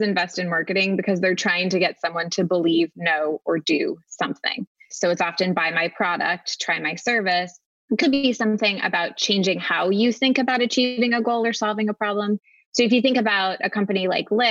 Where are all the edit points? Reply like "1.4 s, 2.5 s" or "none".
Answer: 4.9 s, 8.0 s